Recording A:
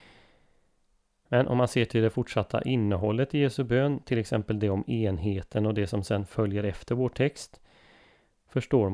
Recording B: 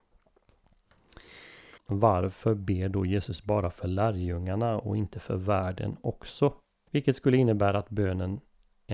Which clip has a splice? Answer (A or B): B